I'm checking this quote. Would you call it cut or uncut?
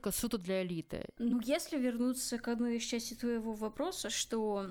cut